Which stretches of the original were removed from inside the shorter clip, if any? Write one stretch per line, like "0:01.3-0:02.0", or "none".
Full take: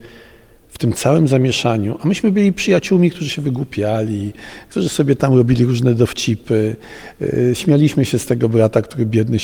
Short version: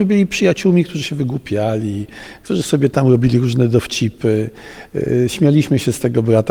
none